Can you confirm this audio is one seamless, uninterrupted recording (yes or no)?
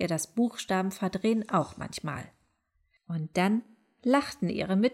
no